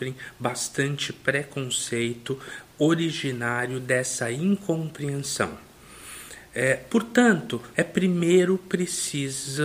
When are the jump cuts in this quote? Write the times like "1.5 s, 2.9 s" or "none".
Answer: 7.7 s

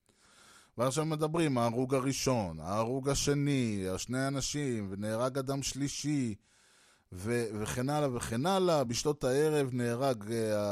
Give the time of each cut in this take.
none

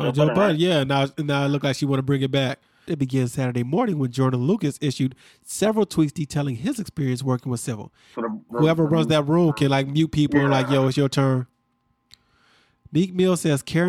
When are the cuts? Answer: 2.9 s, 8.1 s

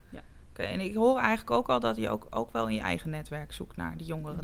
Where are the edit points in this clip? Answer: none

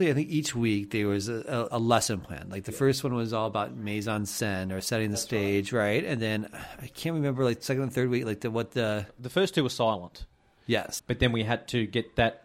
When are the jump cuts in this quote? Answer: 1.7 s, 11.0 s

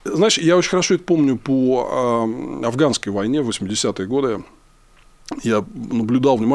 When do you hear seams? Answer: none

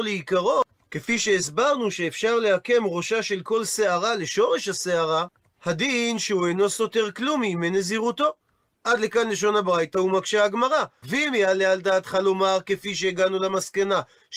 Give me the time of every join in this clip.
11.0 s

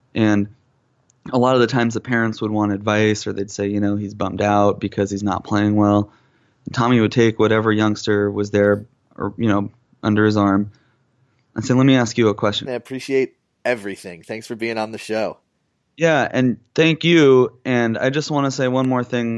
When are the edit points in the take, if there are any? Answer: 12.7 s

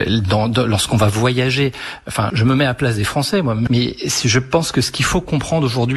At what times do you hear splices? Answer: 2.3 s, 3.7 s

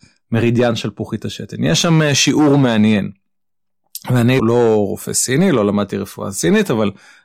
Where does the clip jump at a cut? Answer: 4.4 s

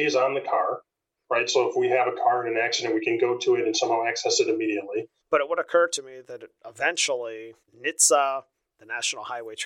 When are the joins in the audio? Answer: 5.2 s, 7.6 s

